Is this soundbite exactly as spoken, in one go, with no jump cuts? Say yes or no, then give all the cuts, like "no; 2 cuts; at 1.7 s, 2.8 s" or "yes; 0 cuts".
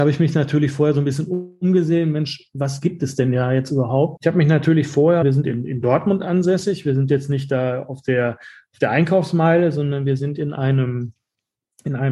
no; 2 cuts; at 4.2 s, 5.2 s